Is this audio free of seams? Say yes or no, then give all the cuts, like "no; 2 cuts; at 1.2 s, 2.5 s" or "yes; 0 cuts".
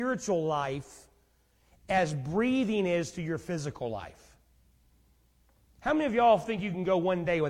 yes; 0 cuts